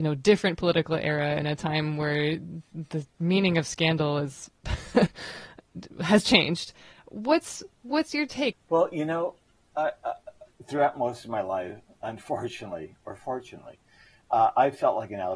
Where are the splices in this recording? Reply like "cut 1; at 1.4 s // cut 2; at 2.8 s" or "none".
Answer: cut 1; at 8.5 s